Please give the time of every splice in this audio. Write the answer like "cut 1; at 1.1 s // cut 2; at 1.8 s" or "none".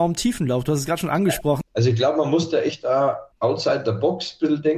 cut 1; at 1.6 s // cut 2; at 3.3 s